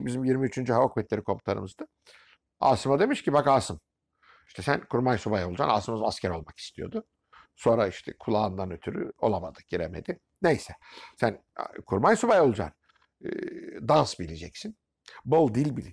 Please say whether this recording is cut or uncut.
uncut